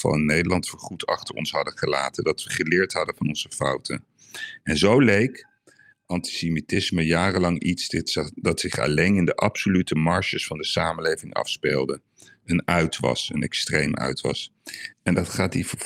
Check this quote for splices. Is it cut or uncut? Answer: cut